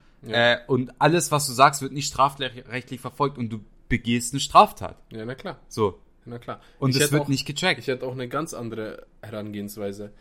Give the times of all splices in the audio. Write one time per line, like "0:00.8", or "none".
none